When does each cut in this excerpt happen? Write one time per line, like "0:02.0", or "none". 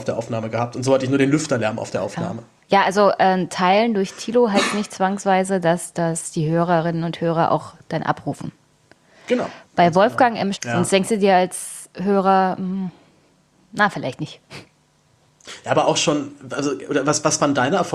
0:10.5